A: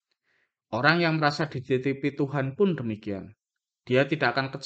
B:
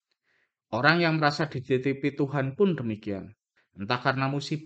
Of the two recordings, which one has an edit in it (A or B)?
B